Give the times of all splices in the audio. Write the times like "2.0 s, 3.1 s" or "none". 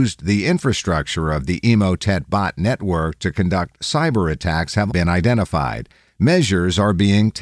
4.9 s